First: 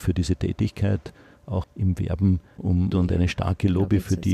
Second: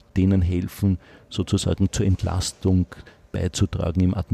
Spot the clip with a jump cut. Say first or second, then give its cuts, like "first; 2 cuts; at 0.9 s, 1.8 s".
first; 2 cuts; at 1.6 s, 2.9 s